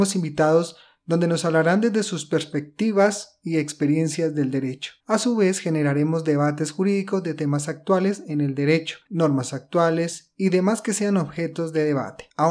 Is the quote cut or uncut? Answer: cut